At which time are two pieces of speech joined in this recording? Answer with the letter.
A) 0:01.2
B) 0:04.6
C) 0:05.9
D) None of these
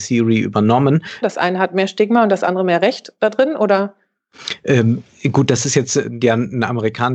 A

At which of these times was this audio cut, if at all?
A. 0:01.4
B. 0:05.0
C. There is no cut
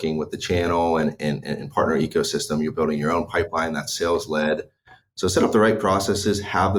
C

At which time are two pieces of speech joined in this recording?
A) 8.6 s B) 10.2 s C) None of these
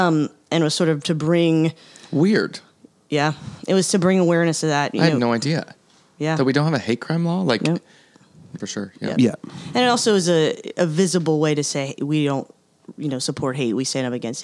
A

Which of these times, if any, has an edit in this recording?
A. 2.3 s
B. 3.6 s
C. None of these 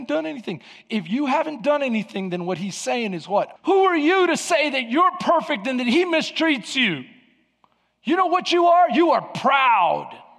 B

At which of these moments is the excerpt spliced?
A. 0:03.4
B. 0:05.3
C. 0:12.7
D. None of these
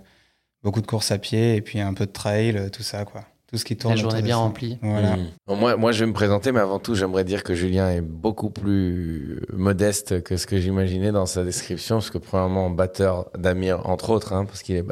B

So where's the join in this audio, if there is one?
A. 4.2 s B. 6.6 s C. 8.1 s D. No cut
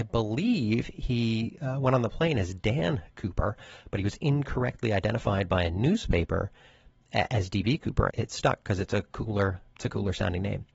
C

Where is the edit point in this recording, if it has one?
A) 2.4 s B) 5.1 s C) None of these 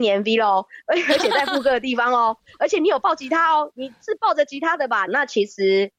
B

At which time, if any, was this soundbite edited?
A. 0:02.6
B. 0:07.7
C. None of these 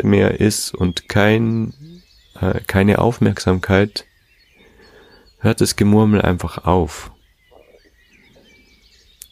C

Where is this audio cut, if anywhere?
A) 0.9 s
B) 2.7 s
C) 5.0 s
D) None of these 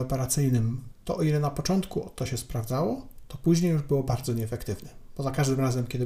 A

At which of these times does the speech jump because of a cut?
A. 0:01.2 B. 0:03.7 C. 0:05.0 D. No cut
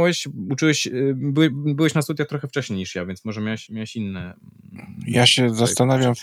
B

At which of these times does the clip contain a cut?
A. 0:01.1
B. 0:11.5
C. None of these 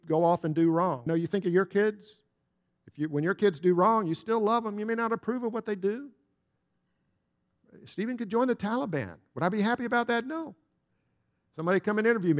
A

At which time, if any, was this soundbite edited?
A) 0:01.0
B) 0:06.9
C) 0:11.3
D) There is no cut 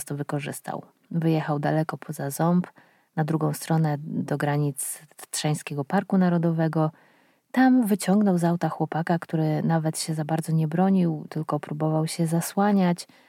C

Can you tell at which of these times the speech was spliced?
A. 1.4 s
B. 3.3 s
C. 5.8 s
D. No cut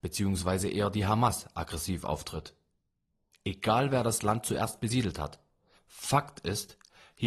C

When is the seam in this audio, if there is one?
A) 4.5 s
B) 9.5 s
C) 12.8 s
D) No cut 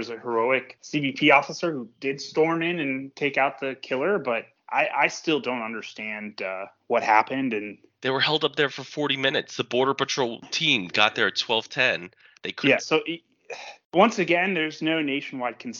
C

